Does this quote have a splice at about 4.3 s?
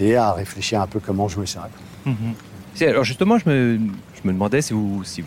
no; 1 cut; at 2.7 s

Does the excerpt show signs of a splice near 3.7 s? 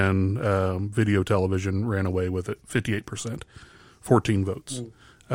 no; 0 cuts

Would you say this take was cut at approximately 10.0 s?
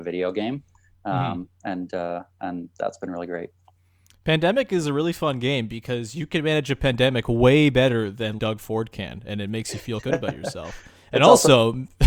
yes; 2 cuts; at 8.4 s, 10.0 s

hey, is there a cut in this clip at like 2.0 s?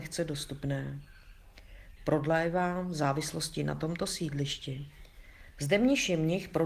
yes; 2 cuts; at 2.0 s, 5.5 s

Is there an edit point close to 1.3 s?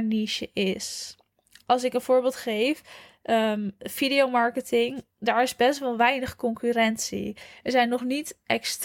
no; 0 cuts

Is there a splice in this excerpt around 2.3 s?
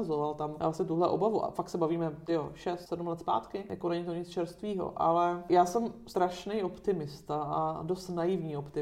no; 0 cuts

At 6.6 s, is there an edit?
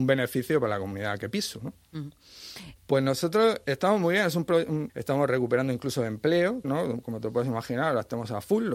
yes; 3 cuts; at 2.8 s, 4.9 s, 6.6 s

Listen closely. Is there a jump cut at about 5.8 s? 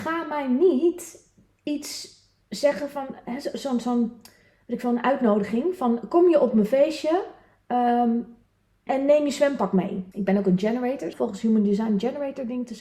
no; 3 cuts; at 8.9 s, 10.1 s, 11.1 s

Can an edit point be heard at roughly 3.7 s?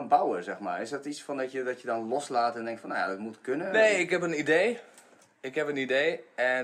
no; 0 cuts

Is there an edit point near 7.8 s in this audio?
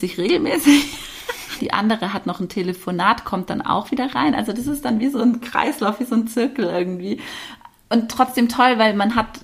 no; 1 cut; at 1.6 s

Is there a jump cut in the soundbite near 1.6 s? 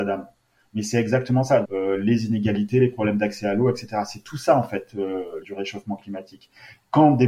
yes; 2 cuts; at 1.6 s, 5.4 s

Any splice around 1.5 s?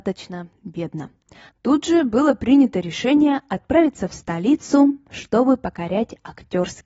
yes; 1 cut; at 1.5 s

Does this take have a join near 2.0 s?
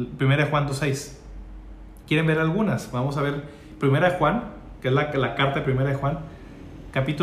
yes; 1 cut; at 2.0 s

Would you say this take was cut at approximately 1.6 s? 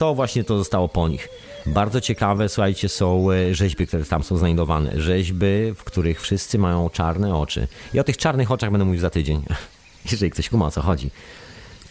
no; 0 cuts

